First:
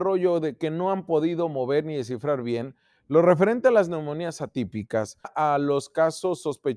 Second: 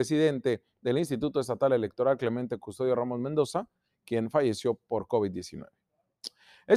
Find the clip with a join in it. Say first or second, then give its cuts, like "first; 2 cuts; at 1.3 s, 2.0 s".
first; 1 cut; at 5.2 s